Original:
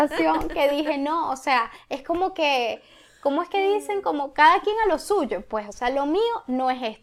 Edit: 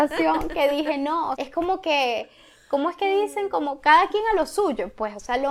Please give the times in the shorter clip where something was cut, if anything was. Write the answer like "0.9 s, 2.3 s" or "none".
1.3 s